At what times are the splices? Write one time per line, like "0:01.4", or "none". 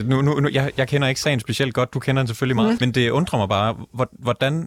0:02.8

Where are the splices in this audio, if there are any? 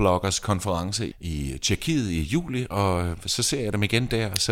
0:01.1
0:02.7

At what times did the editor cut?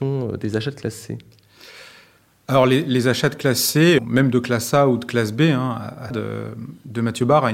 0:04.0
0:06.1

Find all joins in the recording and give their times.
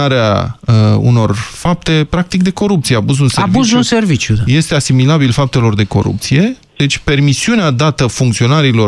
none

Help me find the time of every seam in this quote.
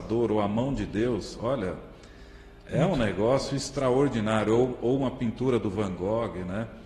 none

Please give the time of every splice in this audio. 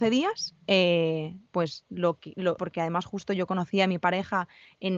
0:02.6

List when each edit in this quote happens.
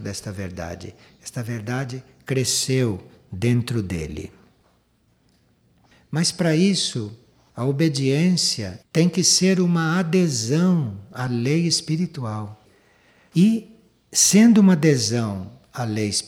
0:08.8

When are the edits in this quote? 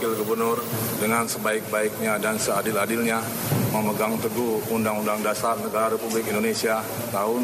none

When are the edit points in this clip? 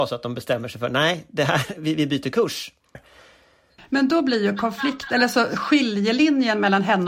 0:02.9

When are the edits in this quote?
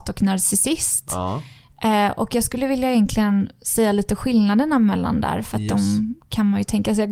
none

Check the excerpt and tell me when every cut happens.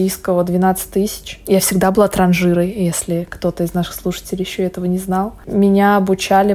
none

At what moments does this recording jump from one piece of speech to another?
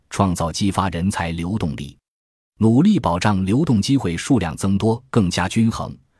0:01.6
0:05.1

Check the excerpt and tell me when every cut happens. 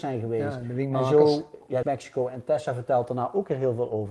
0:01.8

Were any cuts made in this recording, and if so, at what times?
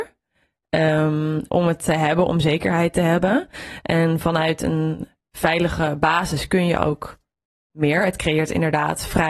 0:01.5

